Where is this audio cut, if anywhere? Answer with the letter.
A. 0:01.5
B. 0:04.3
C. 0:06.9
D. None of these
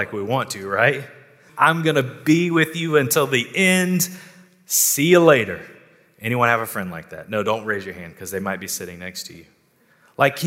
A